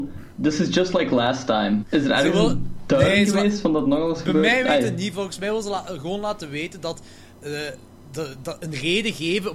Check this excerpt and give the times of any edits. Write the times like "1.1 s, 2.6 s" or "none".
1.8 s